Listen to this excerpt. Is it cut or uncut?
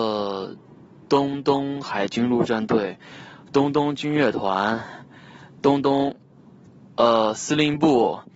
uncut